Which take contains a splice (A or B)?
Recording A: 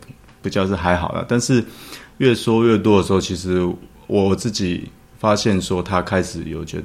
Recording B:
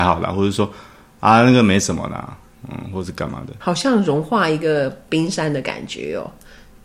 B